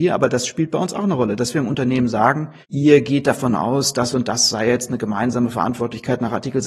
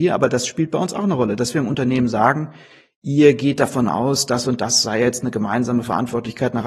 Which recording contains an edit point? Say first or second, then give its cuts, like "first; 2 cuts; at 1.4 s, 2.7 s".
first; 1 cut; at 2.6 s